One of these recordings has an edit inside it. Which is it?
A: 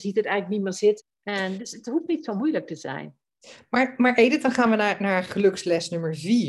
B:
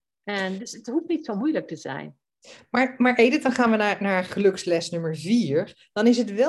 A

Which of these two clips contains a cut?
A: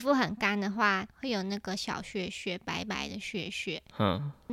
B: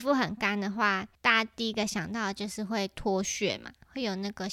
A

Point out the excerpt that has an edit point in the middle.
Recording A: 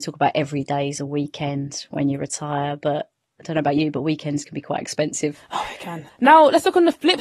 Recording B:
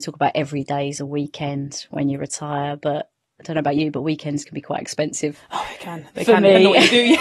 A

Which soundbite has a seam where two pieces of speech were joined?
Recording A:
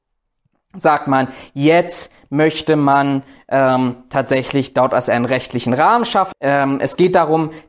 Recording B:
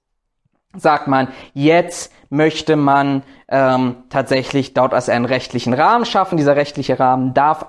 A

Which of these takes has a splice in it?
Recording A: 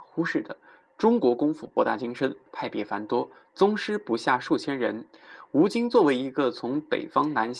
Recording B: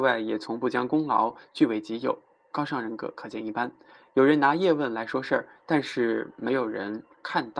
A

